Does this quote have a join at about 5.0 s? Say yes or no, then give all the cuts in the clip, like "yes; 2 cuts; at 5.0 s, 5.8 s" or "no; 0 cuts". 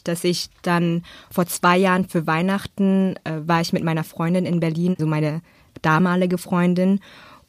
yes; 1 cut; at 5.0 s